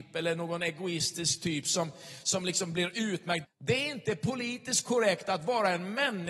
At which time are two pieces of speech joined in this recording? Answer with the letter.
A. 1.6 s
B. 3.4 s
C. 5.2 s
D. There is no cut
B